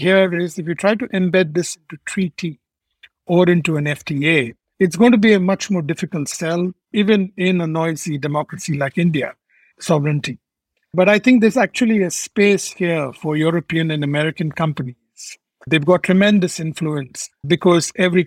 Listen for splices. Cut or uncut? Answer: cut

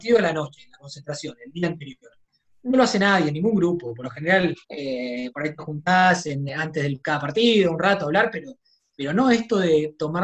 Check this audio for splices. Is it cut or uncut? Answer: cut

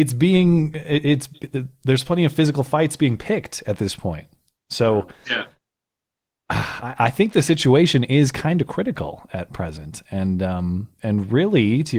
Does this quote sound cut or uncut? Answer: cut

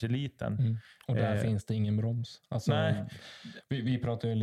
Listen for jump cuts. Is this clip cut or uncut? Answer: uncut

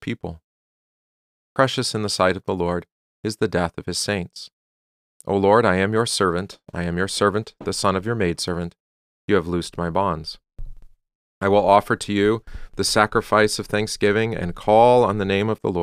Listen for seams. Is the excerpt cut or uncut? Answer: uncut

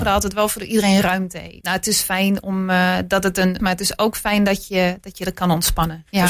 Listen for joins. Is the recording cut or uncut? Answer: cut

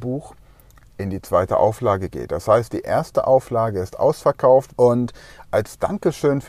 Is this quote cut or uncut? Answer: cut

